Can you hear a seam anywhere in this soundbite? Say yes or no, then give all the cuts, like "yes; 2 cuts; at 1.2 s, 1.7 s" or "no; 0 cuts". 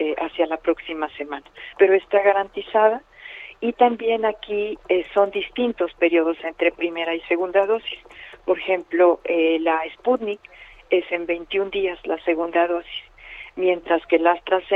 no; 0 cuts